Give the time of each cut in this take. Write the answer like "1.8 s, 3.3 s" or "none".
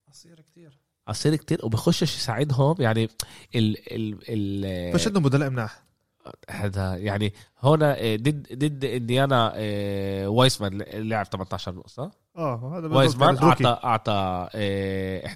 13.4 s